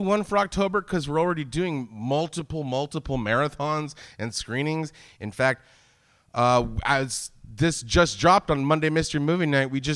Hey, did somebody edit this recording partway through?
no; 0 cuts

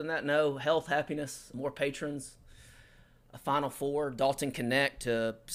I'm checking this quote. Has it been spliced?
yes; 1 cut; at 1.5 s

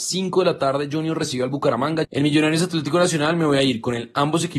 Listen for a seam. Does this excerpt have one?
yes; 1 cut; at 2.0 s

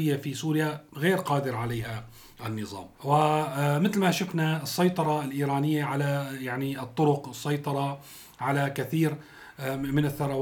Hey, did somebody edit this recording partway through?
yes; 1 cut; at 2.9 s

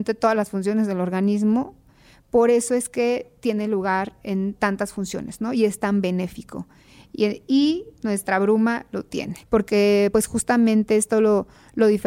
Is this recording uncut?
yes; 0 cuts

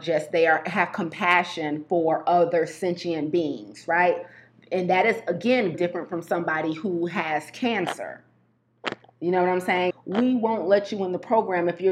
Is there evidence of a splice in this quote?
yes; 2 cuts; at 5.7 s, 9.9 s

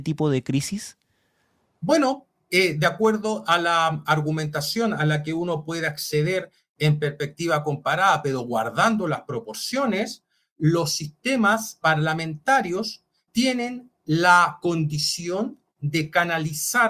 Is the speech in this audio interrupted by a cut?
no; 0 cuts

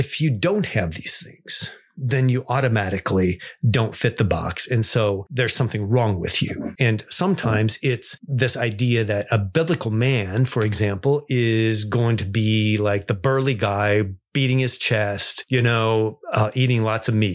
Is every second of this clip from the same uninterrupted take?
yes; 0 cuts

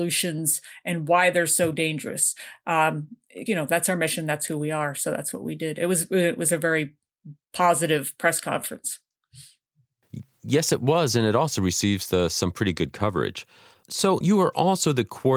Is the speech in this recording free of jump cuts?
no; 2 cuts; at 3.5 s, 14.2 s

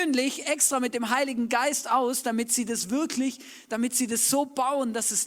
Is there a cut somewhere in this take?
no; 0 cuts

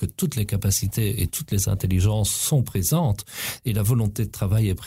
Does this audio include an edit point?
no; 0 cuts

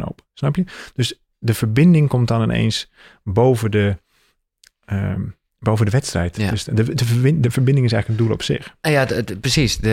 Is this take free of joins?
yes; 0 cuts

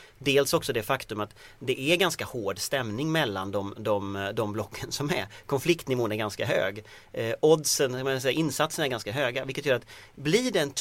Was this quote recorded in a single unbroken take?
yes; 0 cuts

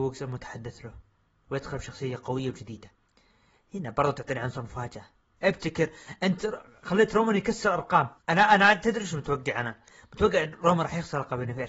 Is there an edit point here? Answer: yes; 2 cuts; at 5.3 s, 8.2 s

